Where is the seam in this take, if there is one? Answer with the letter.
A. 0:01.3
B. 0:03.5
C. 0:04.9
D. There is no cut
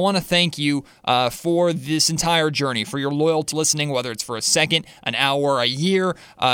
B